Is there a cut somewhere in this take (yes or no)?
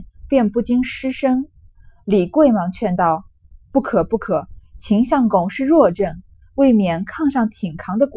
no